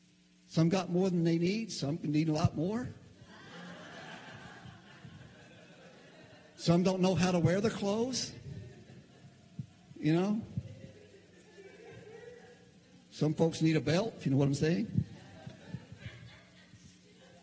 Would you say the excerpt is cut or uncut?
uncut